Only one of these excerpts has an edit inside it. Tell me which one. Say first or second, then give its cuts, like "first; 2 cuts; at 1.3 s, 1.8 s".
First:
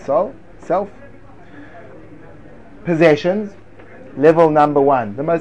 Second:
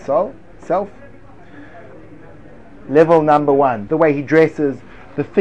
second; 2 cuts; at 2.8 s, 3.9 s